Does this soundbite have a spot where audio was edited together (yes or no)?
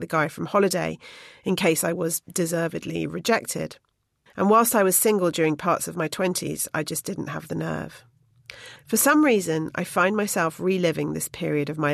yes